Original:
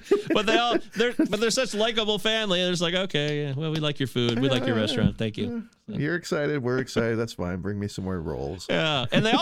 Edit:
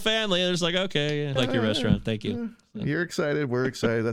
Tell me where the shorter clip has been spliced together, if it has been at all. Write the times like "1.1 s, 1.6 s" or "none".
1.4 s